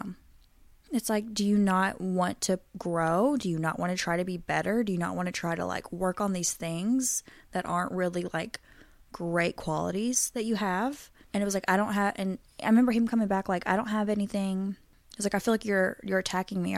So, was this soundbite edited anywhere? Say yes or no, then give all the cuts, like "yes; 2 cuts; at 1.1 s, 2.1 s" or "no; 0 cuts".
no; 0 cuts